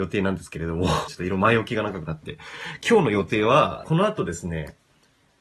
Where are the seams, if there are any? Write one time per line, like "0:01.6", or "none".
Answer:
0:01.1
0:03.8